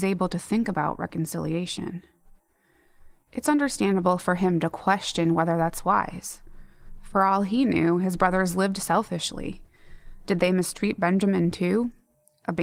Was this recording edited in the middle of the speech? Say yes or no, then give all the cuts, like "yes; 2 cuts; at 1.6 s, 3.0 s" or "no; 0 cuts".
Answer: no; 0 cuts